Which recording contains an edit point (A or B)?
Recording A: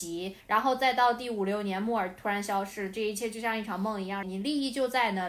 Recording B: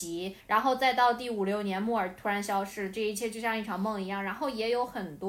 A